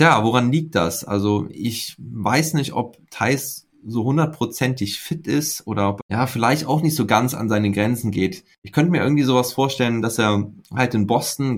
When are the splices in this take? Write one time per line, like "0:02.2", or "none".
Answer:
0:06.0